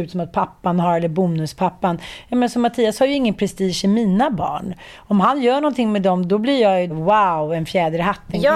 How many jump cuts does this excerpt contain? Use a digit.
1